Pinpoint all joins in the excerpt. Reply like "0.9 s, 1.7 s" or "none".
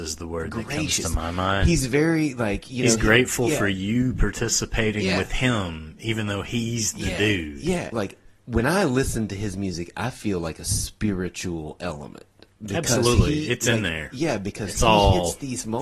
7.9 s